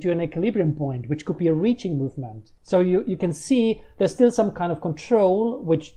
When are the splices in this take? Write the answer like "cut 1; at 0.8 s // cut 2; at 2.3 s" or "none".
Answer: cut 1; at 2.6 s